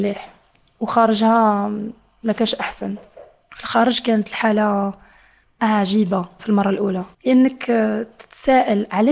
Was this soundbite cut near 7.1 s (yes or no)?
yes